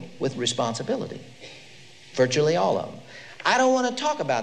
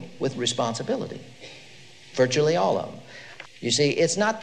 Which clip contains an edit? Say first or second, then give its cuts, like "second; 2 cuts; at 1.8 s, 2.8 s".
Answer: second; 1 cut; at 3.4 s